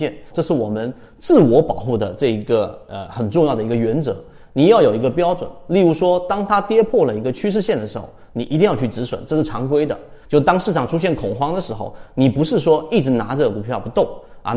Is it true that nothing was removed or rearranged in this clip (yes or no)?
no